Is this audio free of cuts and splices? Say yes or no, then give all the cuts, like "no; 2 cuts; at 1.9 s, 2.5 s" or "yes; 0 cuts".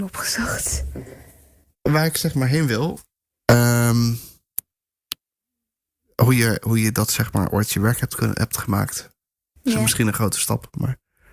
yes; 0 cuts